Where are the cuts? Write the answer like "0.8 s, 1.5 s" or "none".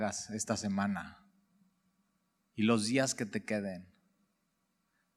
none

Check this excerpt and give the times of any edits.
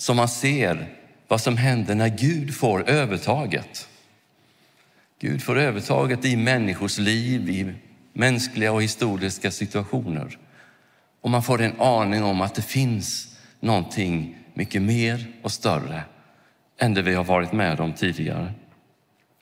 none

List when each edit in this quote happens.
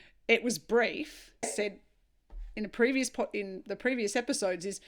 1.4 s

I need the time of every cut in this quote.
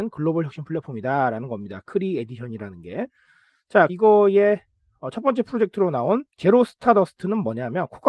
3.9 s, 6.3 s

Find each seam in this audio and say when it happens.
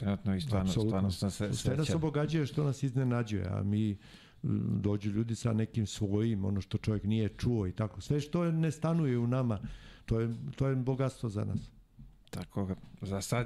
none

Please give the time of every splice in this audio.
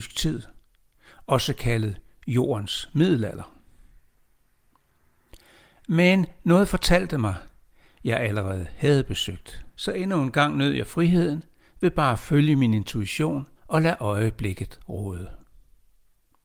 7.9 s, 9.7 s, 13.6 s

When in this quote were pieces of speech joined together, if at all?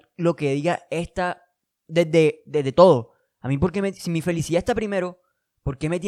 none

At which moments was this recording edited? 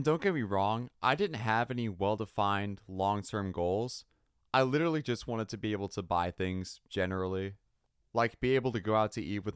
none

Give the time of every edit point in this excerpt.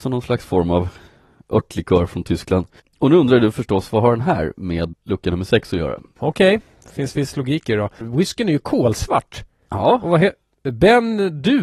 4.9 s, 6.2 s, 8.0 s

